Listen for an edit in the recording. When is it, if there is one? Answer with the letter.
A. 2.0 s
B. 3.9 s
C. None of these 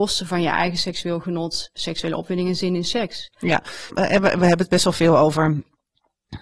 B